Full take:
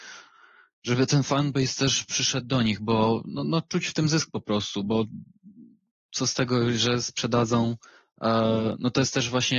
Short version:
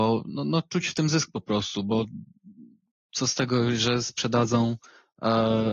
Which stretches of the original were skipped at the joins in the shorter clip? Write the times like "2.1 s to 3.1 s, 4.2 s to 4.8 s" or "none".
none